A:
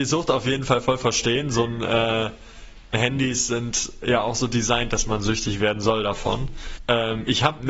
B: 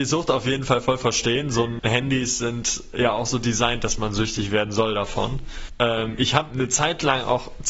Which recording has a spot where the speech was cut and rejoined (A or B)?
B